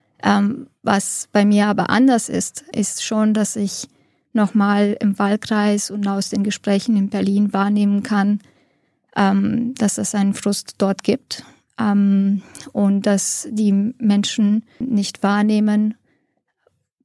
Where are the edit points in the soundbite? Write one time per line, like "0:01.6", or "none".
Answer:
0:02.7
0:14.8